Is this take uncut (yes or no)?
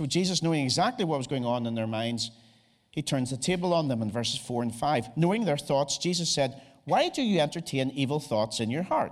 yes